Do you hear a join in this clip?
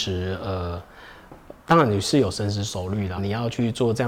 yes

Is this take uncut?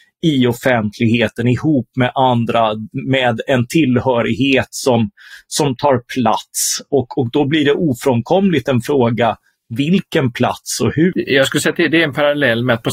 no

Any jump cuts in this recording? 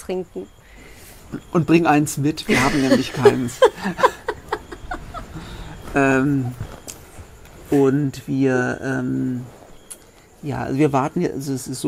no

